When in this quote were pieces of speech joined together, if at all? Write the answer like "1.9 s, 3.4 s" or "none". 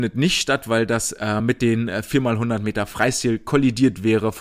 none